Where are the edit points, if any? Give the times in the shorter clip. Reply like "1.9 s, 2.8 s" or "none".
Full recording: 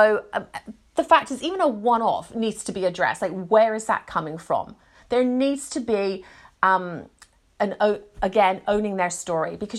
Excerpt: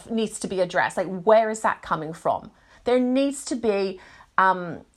none